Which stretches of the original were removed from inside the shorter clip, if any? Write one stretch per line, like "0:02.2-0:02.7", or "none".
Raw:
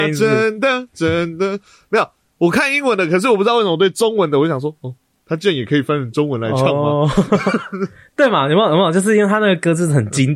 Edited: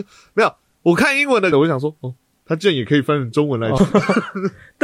0:03.1-0:04.3
0:06.6-0:07.2